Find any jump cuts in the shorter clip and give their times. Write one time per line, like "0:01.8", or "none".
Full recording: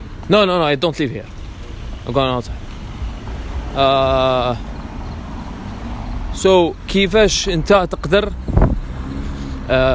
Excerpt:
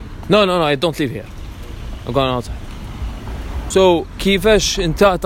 0:03.7